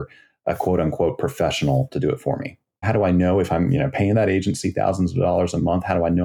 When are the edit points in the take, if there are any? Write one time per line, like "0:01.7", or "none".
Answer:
0:02.8